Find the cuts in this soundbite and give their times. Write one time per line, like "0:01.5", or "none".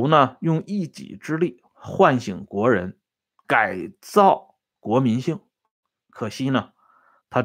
0:03.4